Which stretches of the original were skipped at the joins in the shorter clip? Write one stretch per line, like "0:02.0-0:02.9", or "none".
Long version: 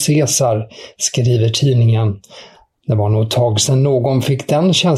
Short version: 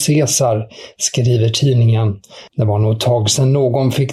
0:02.5-0:02.8